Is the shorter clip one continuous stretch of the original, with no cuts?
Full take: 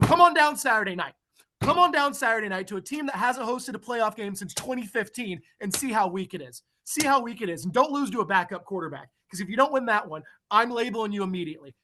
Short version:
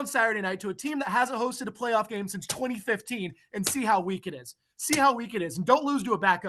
yes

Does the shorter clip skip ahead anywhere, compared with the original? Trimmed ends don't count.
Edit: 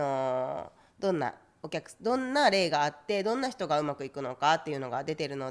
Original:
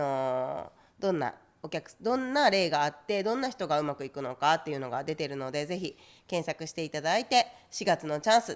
no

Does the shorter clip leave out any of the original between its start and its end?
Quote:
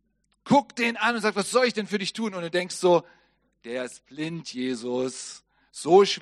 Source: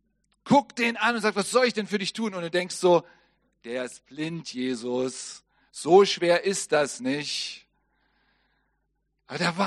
no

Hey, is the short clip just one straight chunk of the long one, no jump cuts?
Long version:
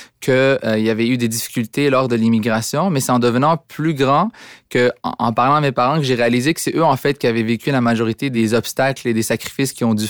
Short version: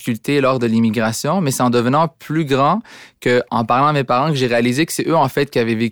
no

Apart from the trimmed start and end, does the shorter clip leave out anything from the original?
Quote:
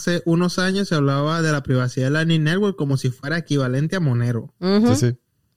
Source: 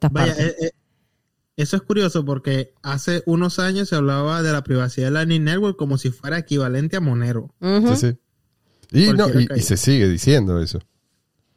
no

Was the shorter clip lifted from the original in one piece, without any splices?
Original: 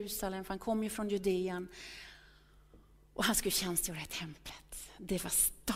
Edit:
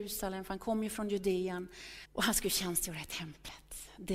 no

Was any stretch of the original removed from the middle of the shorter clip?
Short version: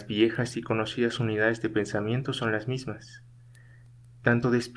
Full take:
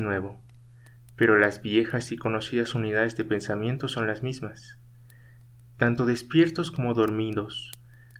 no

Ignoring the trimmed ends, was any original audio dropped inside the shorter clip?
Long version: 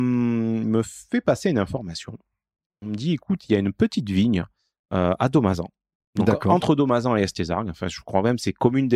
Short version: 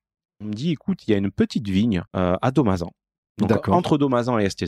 yes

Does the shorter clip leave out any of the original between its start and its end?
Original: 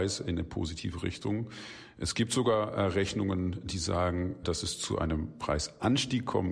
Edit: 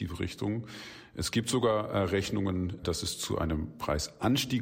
yes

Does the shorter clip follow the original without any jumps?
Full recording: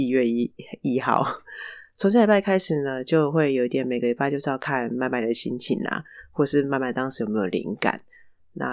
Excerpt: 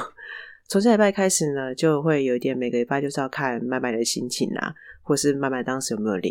yes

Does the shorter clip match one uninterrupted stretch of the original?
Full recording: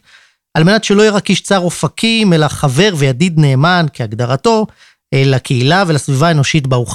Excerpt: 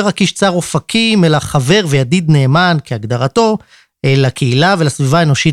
yes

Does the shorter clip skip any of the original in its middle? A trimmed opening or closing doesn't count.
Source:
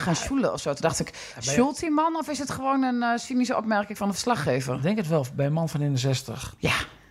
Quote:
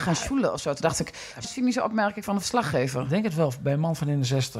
yes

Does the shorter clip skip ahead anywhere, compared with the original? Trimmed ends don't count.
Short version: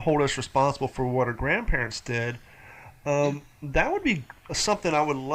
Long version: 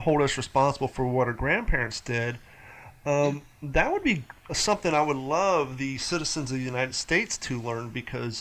no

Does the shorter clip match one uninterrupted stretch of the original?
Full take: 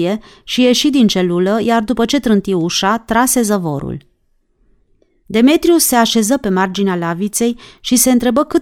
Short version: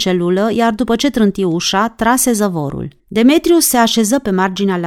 no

